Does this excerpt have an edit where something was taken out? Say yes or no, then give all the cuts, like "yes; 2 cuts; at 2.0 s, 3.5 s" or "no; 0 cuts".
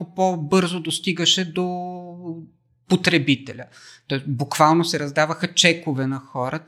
no; 0 cuts